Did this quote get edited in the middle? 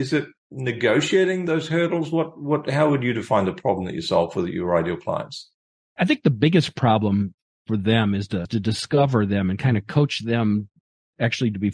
no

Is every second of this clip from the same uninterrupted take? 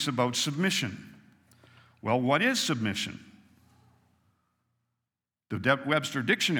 yes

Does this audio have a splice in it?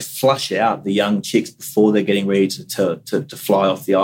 no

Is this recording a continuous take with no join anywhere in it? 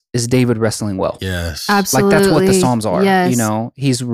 yes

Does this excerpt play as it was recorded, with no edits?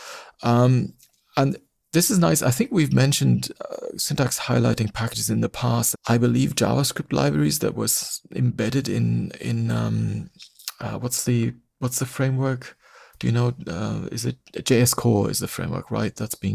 no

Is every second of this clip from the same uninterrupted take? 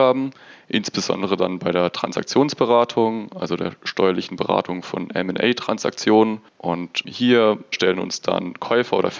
yes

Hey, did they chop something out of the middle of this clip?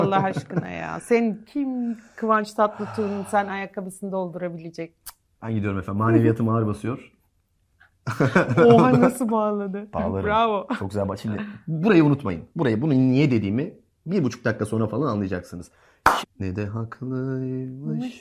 yes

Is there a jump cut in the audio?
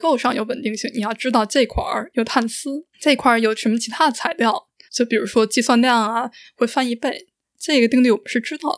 yes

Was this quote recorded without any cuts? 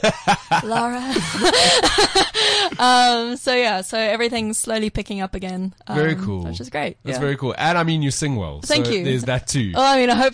yes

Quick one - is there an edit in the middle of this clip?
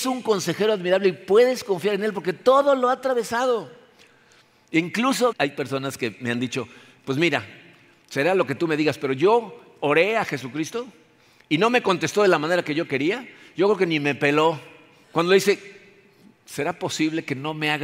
yes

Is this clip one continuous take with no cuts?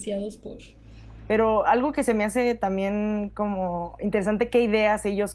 yes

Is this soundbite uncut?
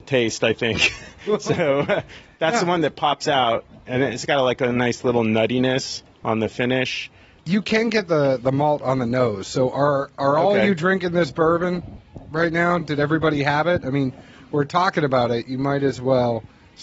yes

